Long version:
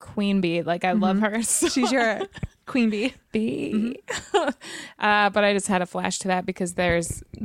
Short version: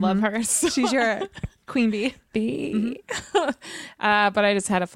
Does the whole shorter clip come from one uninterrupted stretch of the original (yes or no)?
yes